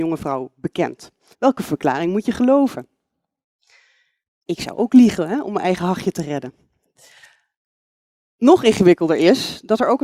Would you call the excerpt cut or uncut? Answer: cut